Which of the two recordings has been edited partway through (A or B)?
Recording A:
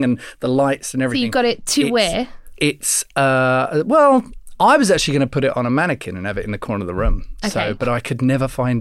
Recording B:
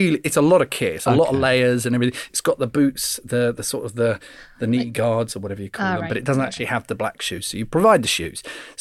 B